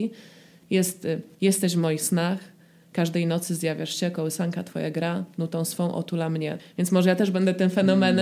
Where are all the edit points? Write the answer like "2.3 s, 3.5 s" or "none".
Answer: 6.6 s